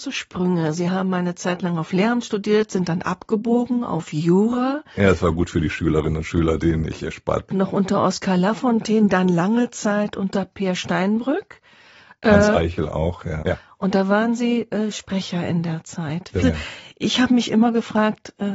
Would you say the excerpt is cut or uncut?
cut